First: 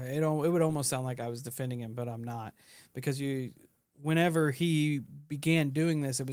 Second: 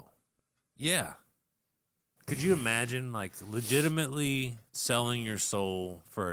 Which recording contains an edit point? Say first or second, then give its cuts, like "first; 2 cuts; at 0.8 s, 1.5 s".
second; 2 cuts; at 2.2 s, 4.7 s